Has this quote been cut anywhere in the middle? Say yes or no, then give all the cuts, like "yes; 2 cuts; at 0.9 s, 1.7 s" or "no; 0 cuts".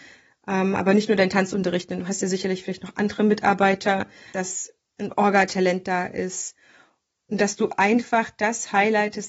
yes; 1 cut; at 4.3 s